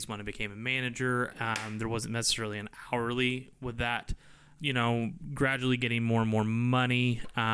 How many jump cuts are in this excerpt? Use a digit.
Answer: 2